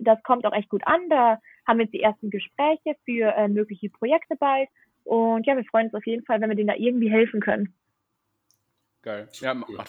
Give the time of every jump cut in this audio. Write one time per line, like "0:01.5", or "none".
none